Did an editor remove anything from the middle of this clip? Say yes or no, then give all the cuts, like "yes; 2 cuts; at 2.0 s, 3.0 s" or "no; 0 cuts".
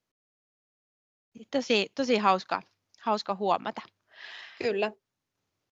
no; 0 cuts